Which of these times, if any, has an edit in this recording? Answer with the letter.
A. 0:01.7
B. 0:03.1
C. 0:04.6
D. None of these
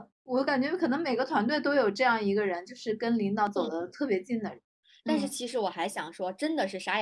C